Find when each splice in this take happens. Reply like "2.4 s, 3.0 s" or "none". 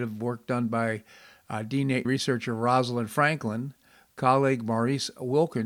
2.0 s